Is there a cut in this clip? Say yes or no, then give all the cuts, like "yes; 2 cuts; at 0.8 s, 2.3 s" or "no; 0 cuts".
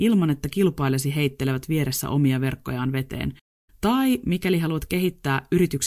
no; 0 cuts